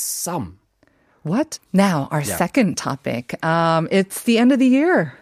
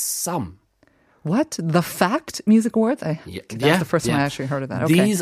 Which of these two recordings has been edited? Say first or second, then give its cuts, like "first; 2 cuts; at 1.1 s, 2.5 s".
first; 1 cut; at 1.6 s